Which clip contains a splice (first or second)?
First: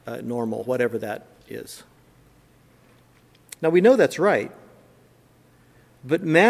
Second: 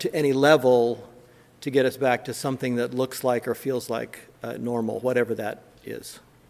first